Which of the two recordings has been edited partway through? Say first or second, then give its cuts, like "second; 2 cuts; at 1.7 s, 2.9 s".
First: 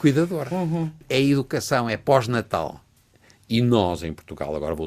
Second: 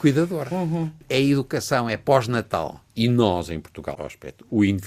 second; 2 cuts; at 2.9 s, 3.9 s